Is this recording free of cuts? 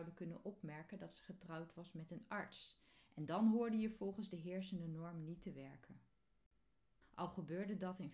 no; 1 cut; at 7.0 s

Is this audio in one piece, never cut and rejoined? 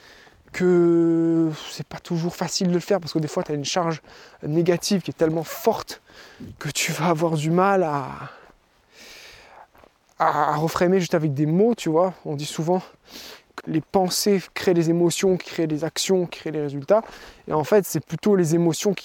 no; 1 cut; at 13.6 s

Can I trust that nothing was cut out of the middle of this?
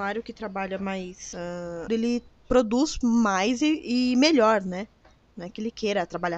no; 1 cut; at 1.9 s

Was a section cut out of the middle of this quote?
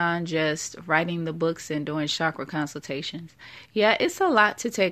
no; 0 cuts

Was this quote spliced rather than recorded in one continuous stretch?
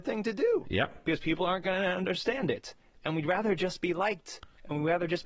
no; 0 cuts

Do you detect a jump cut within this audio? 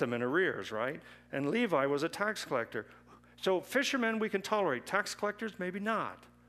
no; 0 cuts

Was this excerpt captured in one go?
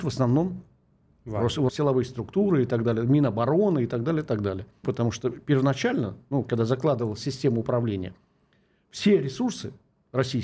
no; 3 cuts; at 1.7 s, 4.8 s, 6.5 s

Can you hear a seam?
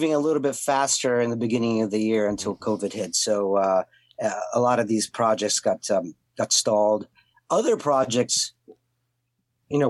no; 0 cuts

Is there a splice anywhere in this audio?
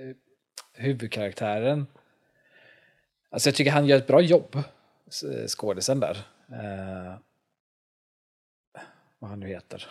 no; 0 cuts

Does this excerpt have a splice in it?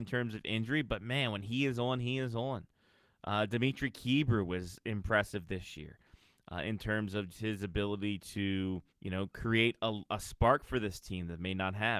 yes; 2 cuts; at 7.3 s, 8.9 s

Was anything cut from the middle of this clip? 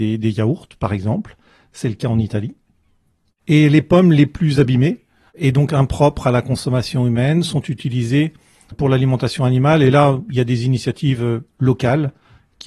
yes; 1 cut; at 8.7 s

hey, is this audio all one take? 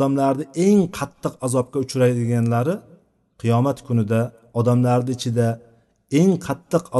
yes; 0 cuts

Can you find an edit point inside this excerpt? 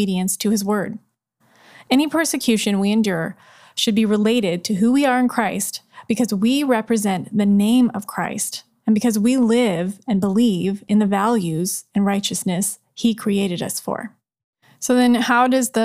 no; 0 cuts

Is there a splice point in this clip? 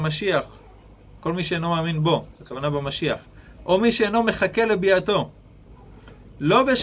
no; 0 cuts

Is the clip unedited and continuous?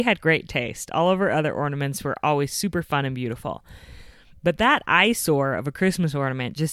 yes; 0 cuts

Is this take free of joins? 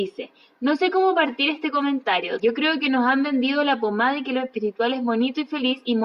no; 1 cut; at 2.4 s

